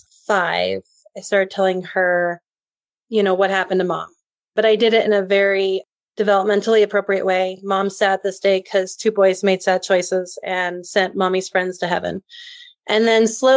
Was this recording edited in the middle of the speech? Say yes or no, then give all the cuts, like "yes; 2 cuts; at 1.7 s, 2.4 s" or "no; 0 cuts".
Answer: no; 0 cuts